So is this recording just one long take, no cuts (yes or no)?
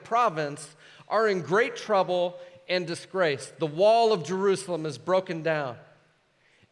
yes